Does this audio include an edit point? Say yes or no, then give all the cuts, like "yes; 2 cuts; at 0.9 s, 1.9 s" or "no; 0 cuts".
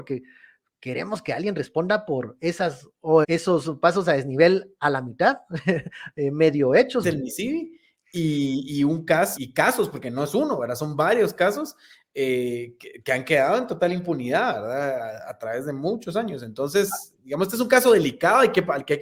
yes; 3 cuts; at 3.2 s, 7.0 s, 9.4 s